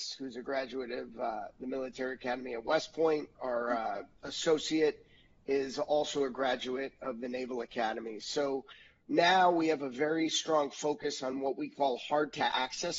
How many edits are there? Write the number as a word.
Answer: one